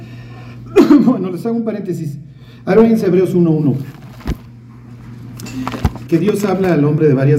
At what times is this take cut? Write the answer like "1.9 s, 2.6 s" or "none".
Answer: 6.1 s